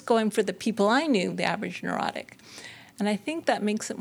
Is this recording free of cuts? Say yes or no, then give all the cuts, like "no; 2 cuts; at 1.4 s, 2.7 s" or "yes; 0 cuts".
no; 1 cut; at 1.3 s